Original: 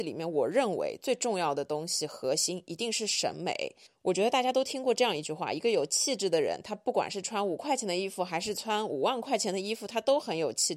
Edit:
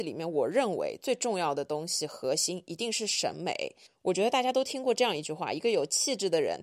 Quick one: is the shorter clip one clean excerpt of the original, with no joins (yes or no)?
yes